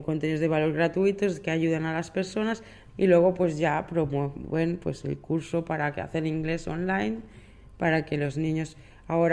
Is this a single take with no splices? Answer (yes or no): no